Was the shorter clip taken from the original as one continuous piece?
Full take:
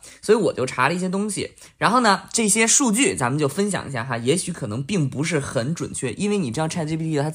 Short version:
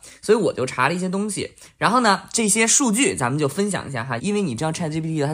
no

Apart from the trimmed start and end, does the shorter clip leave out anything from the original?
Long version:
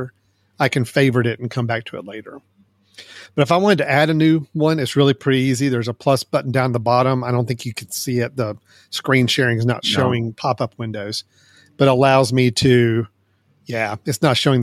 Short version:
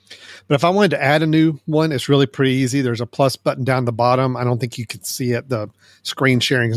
no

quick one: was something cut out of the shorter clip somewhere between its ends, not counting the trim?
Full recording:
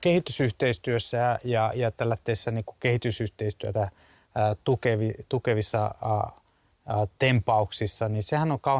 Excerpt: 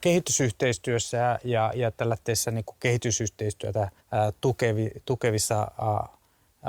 yes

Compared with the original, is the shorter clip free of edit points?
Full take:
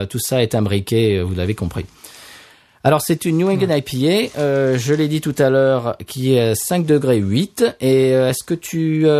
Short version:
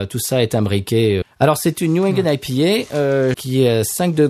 no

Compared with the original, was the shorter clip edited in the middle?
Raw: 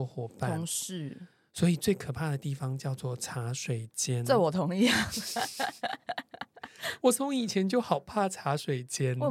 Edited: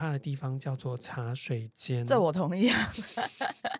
no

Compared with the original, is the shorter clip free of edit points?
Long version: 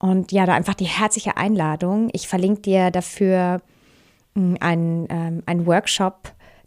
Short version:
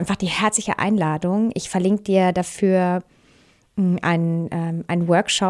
yes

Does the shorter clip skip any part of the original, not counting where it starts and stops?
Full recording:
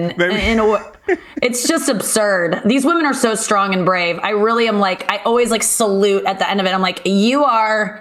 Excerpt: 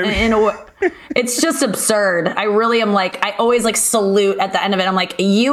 yes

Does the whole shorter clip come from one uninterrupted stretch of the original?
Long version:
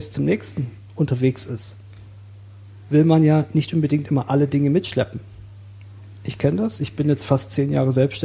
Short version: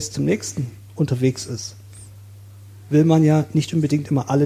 yes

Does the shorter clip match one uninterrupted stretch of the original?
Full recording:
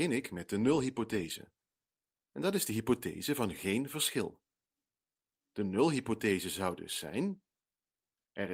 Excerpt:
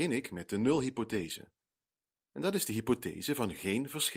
yes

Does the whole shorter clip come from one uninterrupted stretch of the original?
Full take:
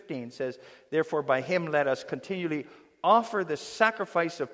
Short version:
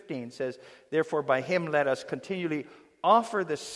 yes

